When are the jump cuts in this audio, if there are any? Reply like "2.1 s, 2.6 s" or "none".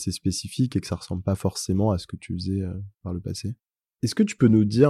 3.9 s